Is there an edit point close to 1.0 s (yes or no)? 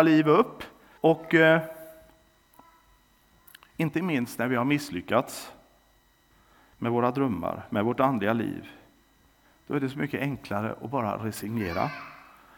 yes